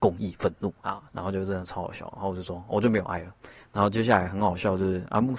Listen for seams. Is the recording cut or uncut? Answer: cut